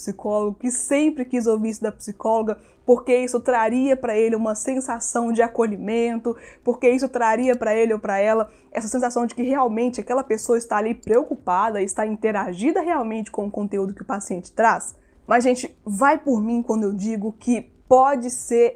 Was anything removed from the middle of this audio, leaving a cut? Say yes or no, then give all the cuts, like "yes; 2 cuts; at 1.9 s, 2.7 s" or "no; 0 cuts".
no; 0 cuts